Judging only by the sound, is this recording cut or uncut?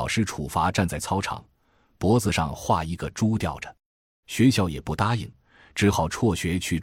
cut